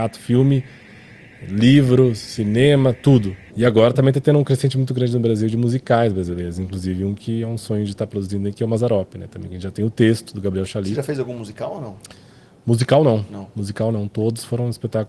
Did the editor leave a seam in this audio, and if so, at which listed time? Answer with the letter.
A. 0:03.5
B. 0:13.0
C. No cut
A